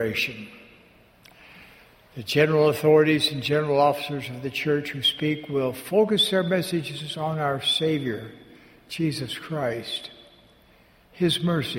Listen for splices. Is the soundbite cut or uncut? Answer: uncut